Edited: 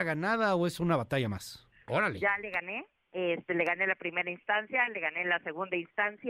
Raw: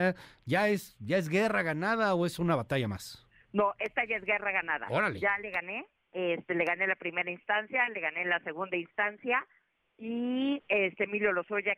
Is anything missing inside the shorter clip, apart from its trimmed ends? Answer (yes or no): yes